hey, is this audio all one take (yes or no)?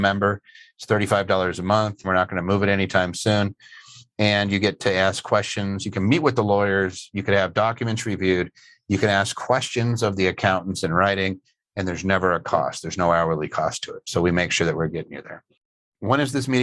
no